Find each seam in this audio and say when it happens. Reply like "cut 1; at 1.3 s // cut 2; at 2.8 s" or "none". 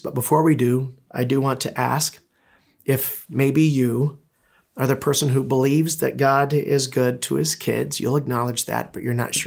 none